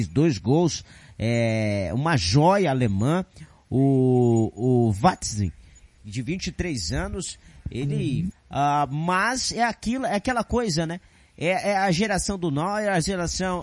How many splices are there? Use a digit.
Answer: 1